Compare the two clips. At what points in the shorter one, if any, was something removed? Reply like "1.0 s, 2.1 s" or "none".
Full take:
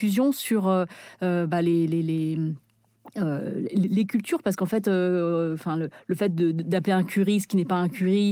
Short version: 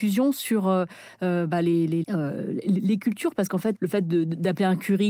2.0 s, 3.7 s